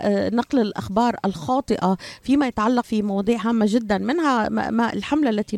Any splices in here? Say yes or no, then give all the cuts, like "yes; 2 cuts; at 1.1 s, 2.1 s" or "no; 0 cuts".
yes; 1 cut; at 2.8 s